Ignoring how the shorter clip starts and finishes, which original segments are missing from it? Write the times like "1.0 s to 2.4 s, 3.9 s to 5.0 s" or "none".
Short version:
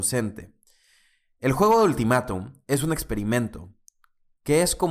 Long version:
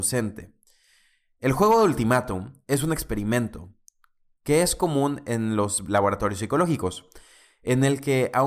none